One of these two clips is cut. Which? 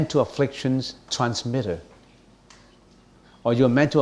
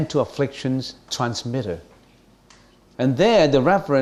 second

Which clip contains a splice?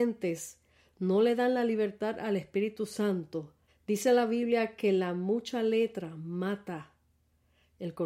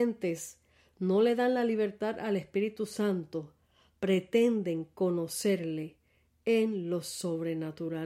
first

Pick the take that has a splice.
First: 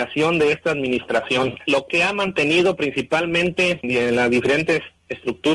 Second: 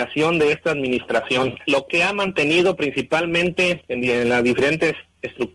first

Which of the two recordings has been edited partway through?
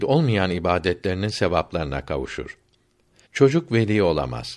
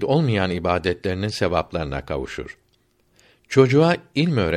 first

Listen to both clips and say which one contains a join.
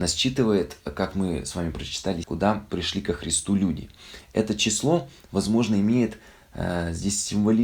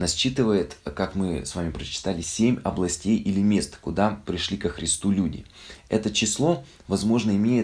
first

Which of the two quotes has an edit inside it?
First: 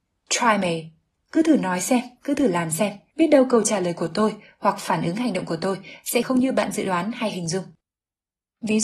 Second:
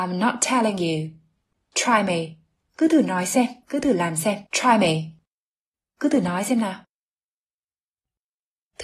second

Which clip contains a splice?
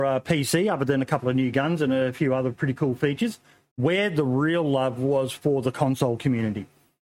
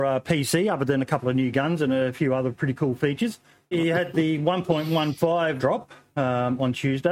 second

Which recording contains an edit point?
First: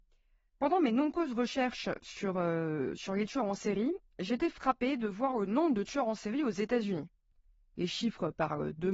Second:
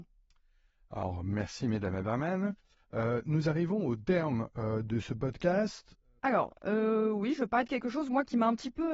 second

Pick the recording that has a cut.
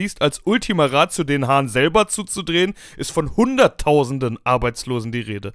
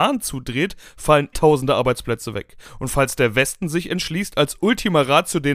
second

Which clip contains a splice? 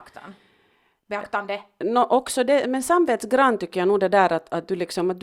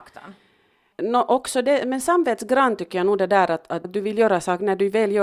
second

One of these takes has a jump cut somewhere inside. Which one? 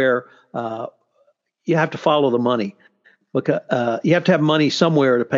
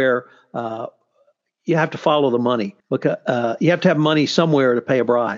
second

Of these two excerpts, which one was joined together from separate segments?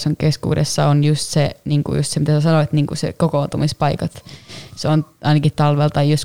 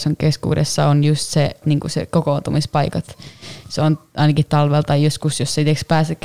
second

